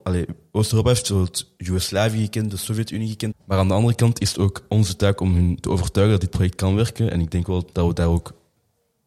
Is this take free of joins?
no; 1 cut; at 3.3 s

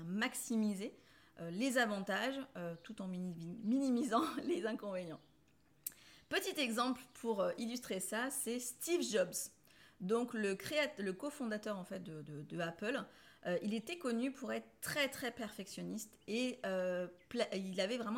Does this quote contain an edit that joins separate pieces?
no; 0 cuts

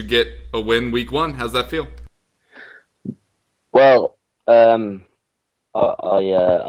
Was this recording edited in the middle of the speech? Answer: no; 0 cuts

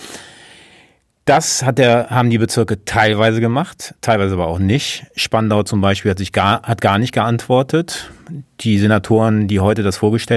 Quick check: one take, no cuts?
yes; 0 cuts

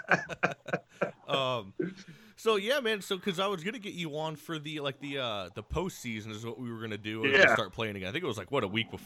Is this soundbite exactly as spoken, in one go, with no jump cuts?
no; 1 cut; at 7.4 s

